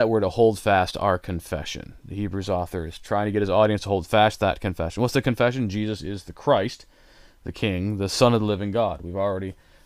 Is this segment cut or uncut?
uncut